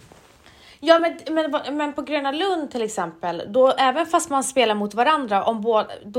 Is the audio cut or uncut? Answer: uncut